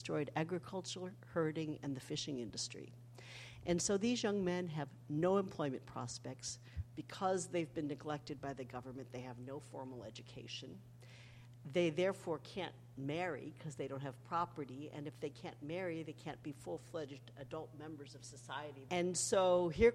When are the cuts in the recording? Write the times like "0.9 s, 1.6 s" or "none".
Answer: 18.9 s